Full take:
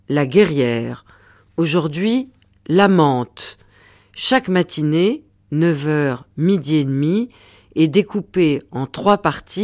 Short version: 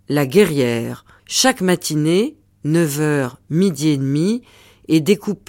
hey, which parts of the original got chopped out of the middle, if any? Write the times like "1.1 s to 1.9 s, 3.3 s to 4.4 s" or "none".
1.2 s to 4.1 s